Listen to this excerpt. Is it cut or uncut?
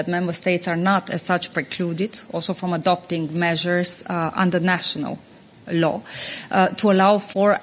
uncut